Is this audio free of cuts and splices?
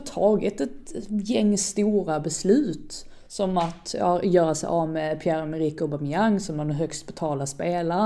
yes; 0 cuts

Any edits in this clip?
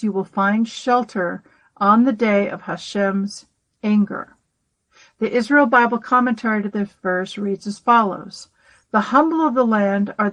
no; 0 cuts

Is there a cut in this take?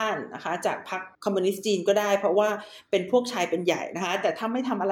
yes; 1 cut; at 1.1 s

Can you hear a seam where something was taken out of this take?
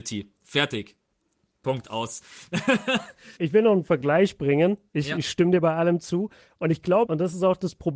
yes; 2 cuts; at 3.4 s, 7.1 s

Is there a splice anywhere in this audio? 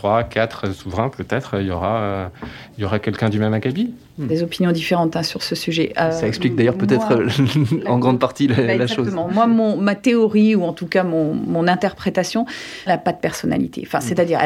yes; 2 cuts; at 4.3 s, 12.9 s

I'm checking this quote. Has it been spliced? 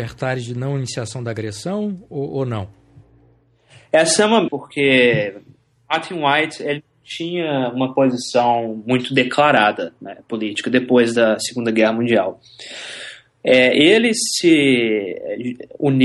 yes; 1 cut; at 4.5 s

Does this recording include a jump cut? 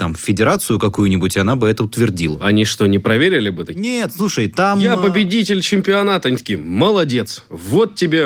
no; 0 cuts

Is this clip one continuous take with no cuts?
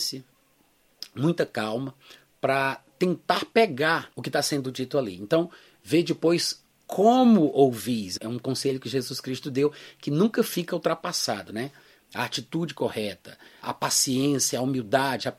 no; 1 cut; at 12.0 s

